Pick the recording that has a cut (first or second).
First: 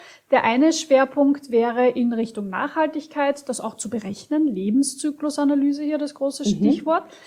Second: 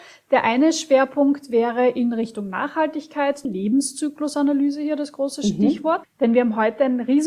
second